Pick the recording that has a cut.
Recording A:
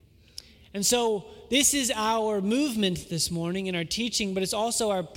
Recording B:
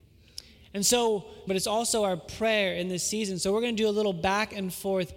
B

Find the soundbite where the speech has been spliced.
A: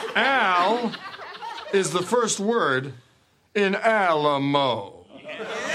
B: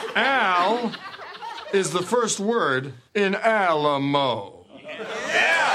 B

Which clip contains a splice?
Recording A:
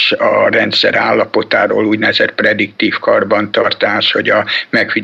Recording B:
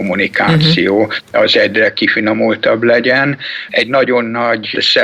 B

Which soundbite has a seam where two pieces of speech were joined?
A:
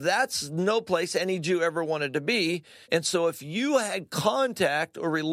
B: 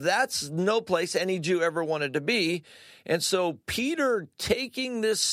A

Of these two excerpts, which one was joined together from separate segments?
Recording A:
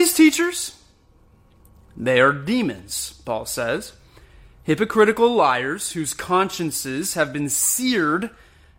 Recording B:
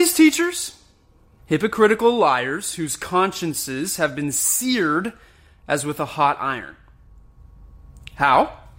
B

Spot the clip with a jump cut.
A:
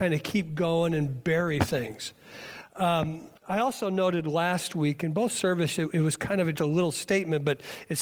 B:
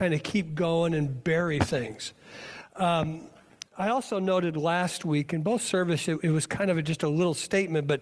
A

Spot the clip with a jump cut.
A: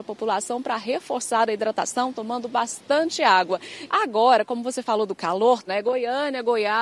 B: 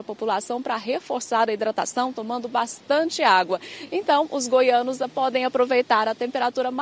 A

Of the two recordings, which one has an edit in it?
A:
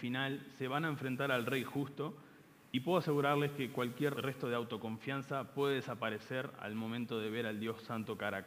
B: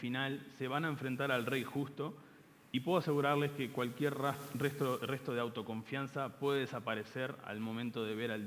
A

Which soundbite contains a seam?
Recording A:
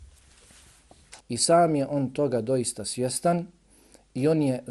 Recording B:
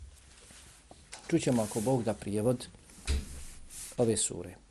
A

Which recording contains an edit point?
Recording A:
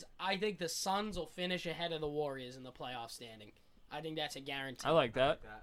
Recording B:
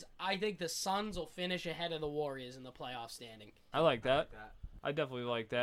B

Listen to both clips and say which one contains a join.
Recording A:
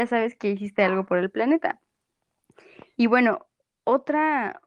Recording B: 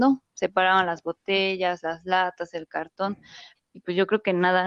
B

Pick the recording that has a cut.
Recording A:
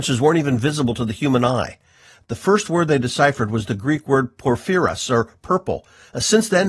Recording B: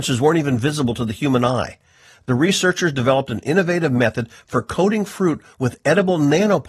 B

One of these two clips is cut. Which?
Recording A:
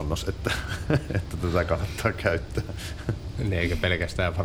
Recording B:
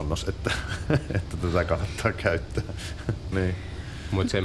B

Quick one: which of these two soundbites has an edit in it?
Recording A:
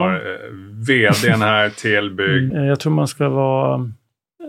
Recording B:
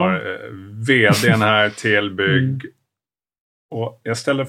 A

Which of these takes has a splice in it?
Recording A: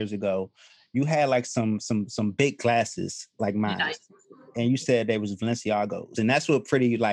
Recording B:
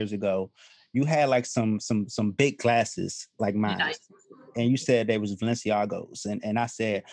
A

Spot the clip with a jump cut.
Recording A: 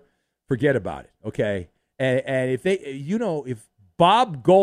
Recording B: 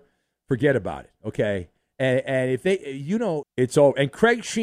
B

